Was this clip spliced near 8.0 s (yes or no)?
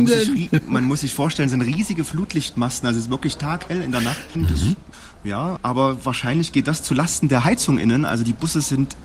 no